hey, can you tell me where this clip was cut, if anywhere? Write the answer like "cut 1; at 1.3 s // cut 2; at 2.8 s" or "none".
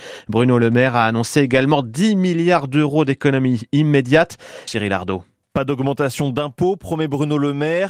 cut 1; at 4.7 s